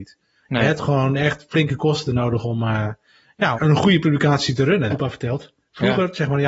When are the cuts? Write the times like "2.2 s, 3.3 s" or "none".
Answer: 3.5 s, 4.9 s